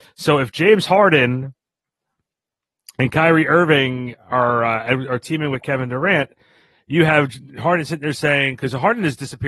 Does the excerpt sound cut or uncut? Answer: uncut